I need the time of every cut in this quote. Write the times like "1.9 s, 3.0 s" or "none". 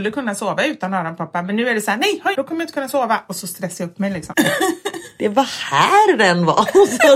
2.4 s, 4.3 s